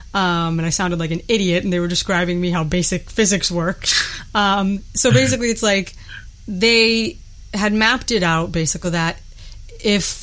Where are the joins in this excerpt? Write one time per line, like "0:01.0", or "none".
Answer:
0:08.8